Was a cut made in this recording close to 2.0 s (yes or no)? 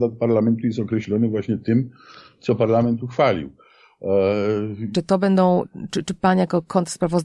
no